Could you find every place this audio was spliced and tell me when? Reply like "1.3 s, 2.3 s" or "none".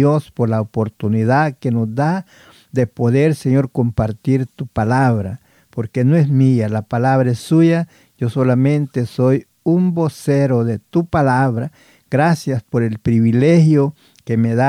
none